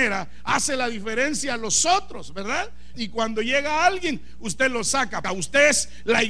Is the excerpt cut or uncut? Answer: cut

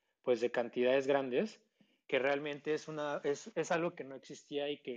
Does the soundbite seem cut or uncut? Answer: cut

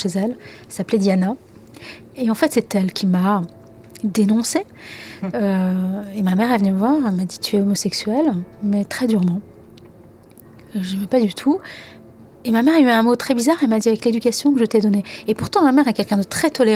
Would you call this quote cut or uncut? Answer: uncut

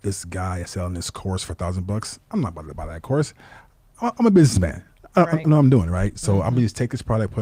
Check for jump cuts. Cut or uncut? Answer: uncut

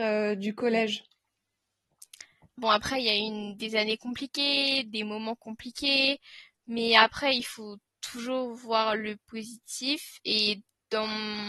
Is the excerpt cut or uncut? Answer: cut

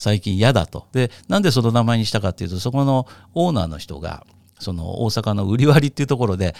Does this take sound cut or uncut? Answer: cut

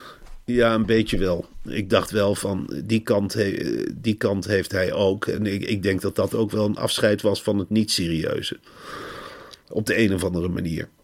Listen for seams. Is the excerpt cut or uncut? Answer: uncut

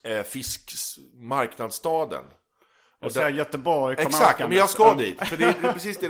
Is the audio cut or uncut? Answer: uncut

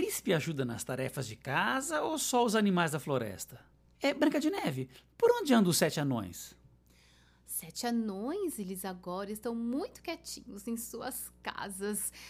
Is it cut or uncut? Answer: cut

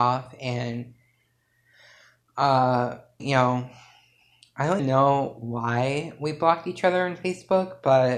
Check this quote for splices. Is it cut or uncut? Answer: cut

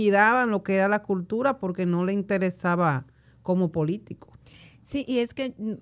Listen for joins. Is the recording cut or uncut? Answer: uncut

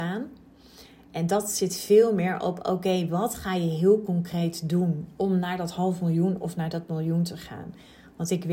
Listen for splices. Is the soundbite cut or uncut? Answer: uncut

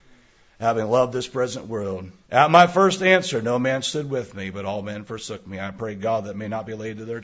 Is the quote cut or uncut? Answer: cut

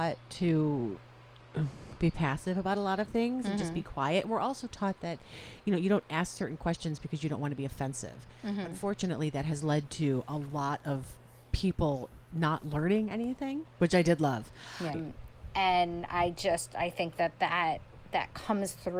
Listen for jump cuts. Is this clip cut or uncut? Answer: cut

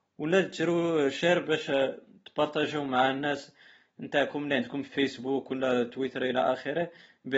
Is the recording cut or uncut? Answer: uncut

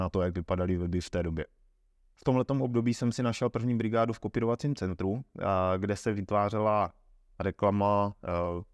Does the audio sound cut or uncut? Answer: uncut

